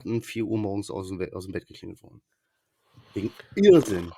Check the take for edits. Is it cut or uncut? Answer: uncut